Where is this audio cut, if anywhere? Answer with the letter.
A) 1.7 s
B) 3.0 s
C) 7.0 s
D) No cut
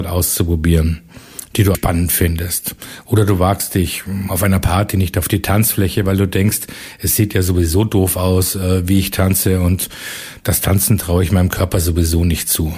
A